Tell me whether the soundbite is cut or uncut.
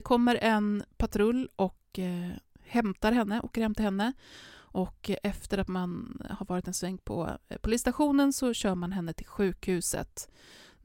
uncut